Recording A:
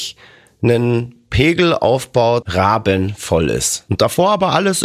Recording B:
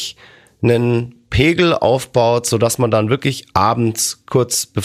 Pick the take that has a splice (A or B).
A